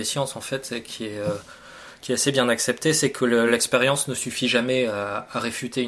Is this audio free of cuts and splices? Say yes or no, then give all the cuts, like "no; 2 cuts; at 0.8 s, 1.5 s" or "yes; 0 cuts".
yes; 0 cuts